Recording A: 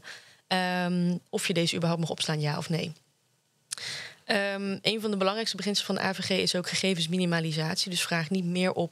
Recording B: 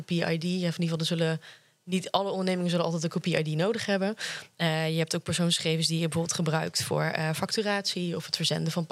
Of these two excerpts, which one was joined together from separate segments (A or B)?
A